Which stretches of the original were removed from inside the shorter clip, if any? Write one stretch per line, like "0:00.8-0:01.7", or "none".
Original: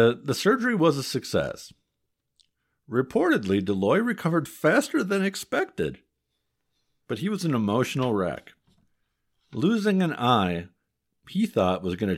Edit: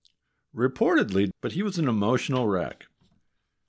0:03.7-0:07.0